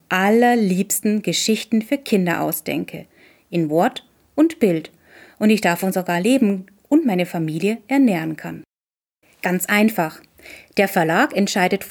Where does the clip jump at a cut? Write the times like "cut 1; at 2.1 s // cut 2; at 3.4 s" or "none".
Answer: cut 1; at 9.2 s